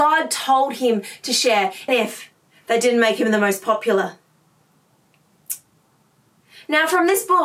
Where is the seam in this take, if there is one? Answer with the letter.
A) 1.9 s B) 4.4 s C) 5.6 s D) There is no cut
A